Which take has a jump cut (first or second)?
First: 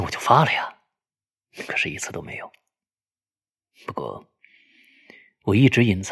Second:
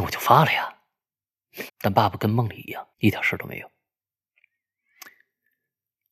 second